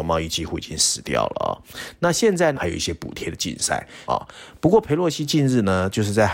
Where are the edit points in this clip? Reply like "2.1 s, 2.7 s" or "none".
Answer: 2.5 s, 4.1 s